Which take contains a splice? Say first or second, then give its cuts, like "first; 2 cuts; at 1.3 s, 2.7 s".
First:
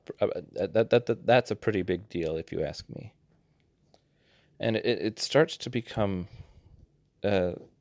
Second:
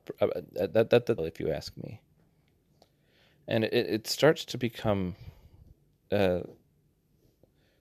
second; 1 cut; at 1.2 s